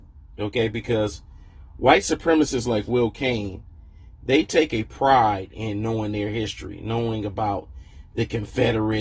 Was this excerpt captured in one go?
yes; 0 cuts

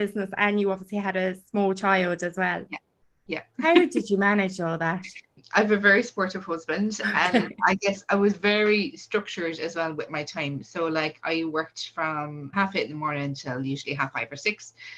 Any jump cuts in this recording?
no; 0 cuts

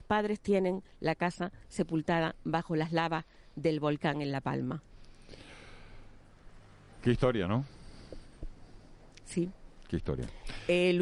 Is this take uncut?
yes; 0 cuts

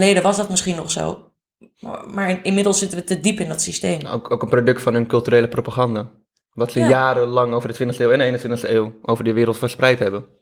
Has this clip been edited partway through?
no; 0 cuts

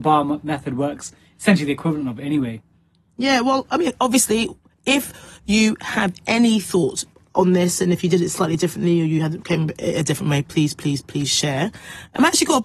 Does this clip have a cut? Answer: no; 0 cuts

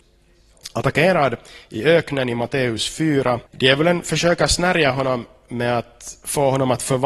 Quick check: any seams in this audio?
yes; 1 cut; at 3.5 s

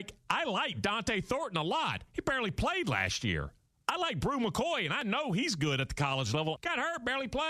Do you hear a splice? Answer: yes; 1 cut; at 6.6 s

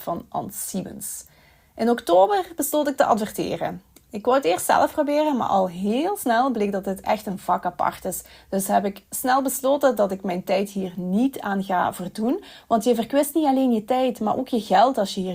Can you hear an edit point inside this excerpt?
no; 0 cuts

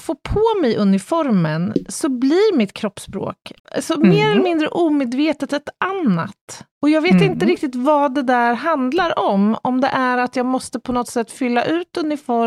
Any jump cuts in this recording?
yes; 2 cuts; at 3.6 s, 6.7 s

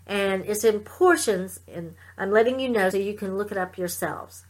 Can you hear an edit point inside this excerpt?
yes; 2 cuts; at 1.7 s, 2.9 s

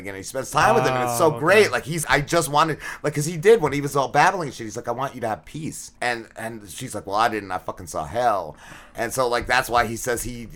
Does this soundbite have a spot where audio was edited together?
yes; 2 cuts; at 2.0 s, 6.0 s

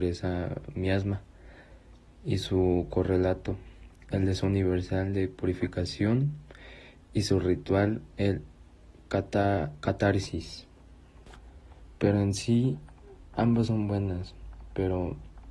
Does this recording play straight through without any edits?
yes; 0 cuts

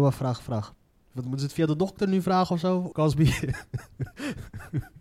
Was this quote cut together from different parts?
yes; 1 cut; at 2.9 s

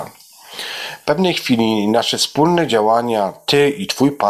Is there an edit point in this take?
yes; 1 cut; at 1.0 s

